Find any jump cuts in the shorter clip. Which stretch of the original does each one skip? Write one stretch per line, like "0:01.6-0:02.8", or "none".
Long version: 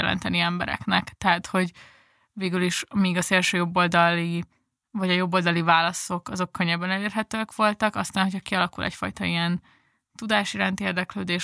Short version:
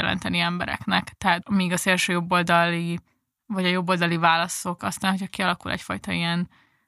0:01.4-0:02.9
0:06.2-0:07.9